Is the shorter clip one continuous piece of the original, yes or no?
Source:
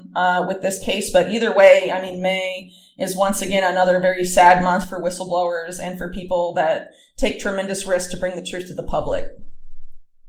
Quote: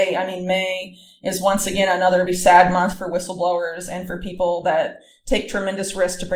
no